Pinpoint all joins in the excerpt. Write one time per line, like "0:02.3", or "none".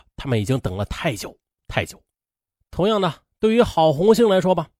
none